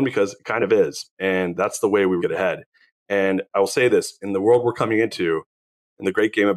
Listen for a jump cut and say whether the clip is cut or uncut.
cut